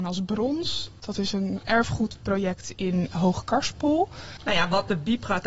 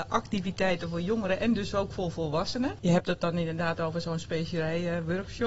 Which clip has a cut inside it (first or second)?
first